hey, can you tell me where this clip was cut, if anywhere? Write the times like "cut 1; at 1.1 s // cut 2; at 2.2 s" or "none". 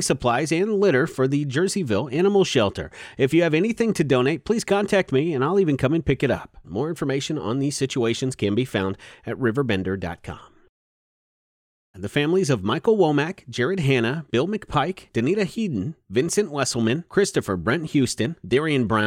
cut 1; at 6.6 s // cut 2; at 11.9 s